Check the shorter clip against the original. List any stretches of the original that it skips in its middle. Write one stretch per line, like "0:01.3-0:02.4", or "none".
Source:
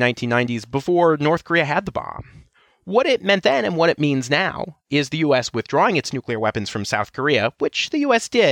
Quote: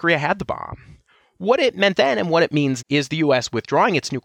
0:04.3-0:04.8